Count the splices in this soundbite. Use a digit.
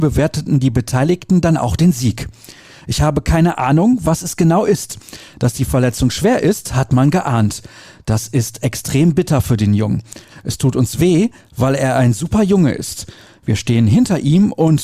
1